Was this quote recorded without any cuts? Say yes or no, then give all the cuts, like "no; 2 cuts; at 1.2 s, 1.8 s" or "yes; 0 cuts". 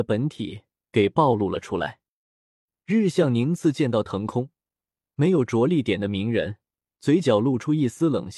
yes; 0 cuts